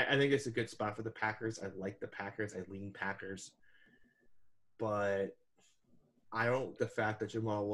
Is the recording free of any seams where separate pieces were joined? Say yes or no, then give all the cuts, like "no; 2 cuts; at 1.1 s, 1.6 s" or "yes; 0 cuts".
no; 1 cut; at 6.8 s